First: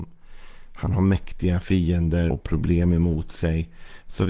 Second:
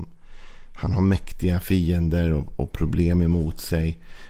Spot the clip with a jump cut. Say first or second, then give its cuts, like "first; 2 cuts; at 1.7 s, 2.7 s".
first; 1 cut; at 2.3 s